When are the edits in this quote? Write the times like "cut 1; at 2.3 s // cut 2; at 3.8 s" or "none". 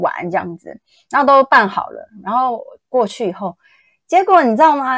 none